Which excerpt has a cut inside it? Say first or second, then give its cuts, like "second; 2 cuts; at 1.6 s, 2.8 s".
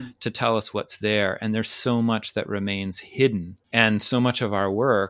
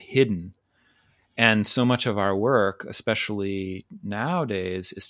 first; 1 cut; at 3.6 s